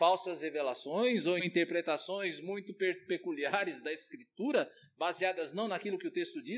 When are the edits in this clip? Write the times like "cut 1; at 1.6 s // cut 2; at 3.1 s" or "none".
cut 1; at 1.4 s